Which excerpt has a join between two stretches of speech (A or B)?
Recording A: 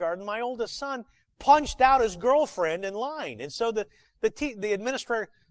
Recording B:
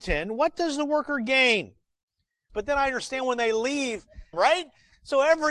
B